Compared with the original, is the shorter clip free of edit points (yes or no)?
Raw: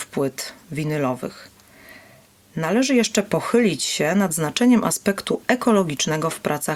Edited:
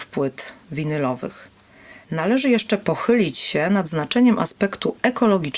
no